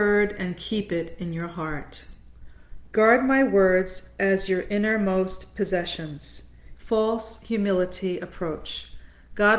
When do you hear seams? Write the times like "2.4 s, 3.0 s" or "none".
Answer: 2.9 s, 6.7 s